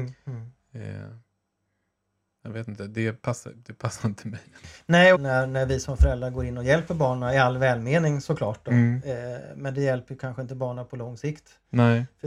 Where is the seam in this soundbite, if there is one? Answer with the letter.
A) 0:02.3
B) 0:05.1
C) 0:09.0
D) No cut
B